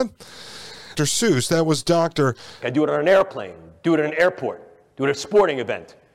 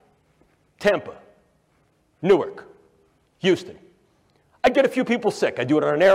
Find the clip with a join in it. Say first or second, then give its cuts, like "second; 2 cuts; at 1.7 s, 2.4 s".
first; 2 cuts; at 1.0 s, 2.6 s